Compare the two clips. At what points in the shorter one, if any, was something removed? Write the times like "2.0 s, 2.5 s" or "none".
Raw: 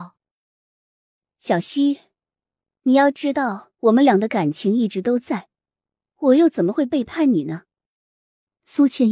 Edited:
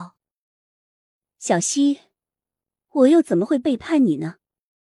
2.7 s